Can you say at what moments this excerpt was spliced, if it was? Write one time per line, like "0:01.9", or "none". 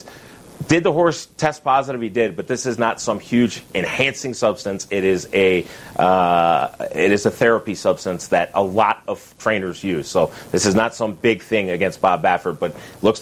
none